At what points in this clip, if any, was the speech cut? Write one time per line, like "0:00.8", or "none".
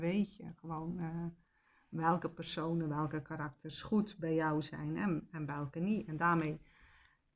none